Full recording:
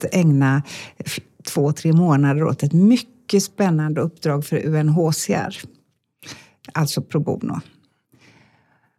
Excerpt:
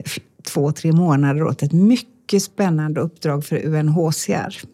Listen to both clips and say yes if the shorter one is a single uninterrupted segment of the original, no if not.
yes